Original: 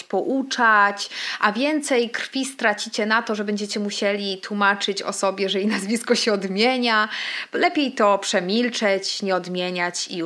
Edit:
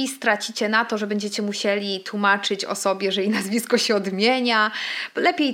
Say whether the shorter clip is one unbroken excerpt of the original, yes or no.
yes